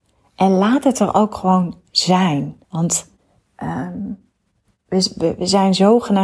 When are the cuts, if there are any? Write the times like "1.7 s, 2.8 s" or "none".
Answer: 2.6 s